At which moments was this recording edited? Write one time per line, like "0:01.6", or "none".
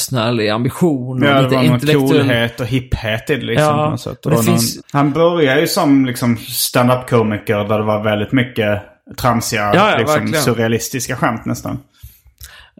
0:04.8